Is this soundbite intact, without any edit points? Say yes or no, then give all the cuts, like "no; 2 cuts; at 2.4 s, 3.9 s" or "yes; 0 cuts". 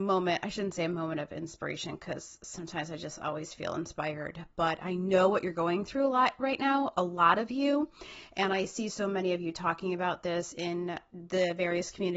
yes; 0 cuts